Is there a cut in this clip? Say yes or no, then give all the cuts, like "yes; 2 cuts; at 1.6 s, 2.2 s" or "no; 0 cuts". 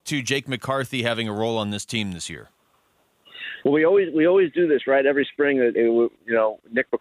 yes; 1 cut; at 5.7 s